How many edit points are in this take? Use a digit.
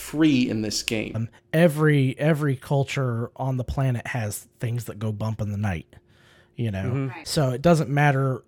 1